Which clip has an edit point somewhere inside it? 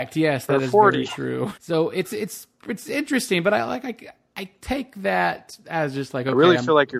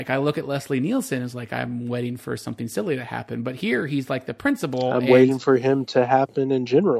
first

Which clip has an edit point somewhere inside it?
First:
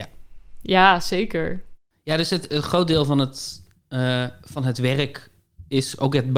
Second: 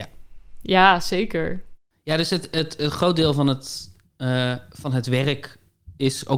first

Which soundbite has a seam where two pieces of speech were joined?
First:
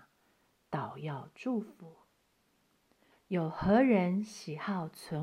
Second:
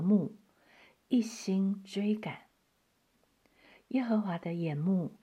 first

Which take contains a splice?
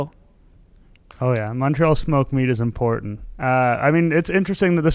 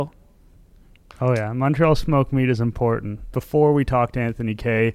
second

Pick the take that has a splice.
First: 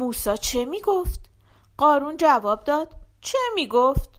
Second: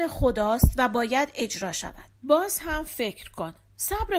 second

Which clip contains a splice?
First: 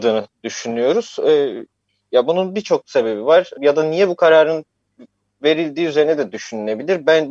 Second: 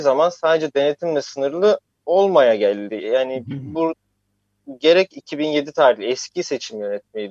first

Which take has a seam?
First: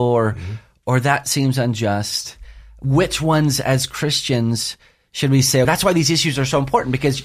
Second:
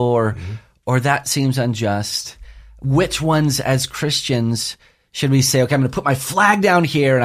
first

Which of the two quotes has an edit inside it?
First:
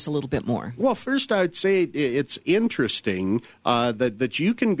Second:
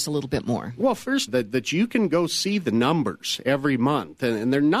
second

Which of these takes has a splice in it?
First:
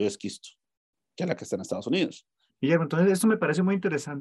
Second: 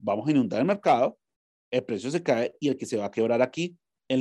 first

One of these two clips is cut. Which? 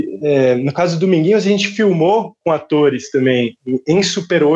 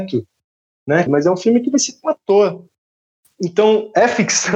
second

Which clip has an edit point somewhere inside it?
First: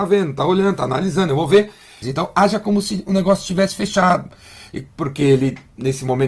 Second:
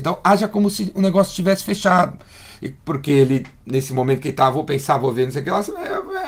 first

